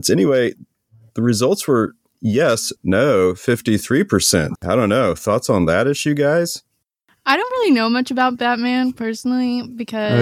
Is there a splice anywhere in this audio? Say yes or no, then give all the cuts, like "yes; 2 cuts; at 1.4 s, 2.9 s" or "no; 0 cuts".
yes; 2 cuts; at 2.8 s, 4.6 s